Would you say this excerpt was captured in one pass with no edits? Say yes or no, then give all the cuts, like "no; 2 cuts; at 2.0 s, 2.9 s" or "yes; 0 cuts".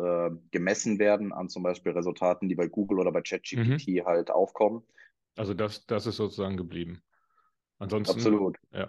no; 1 cut; at 5.2 s